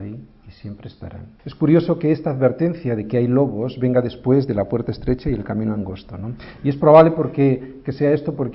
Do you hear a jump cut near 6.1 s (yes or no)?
no